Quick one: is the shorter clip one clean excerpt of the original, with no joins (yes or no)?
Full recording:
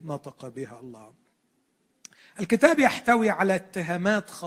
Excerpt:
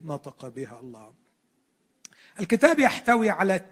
yes